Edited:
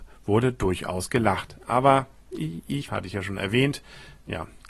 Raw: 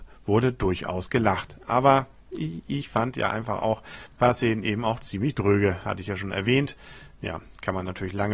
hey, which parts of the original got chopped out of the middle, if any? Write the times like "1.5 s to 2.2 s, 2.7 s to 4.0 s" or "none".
2.9 s to 5.8 s